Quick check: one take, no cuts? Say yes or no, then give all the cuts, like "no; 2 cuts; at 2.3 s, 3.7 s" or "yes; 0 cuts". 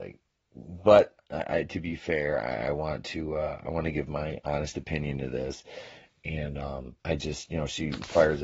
no; 1 cut; at 7.0 s